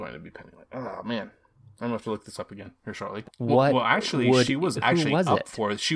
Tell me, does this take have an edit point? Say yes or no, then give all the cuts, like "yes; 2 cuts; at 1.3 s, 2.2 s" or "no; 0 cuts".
yes; 2 cuts; at 3.2 s, 4.7 s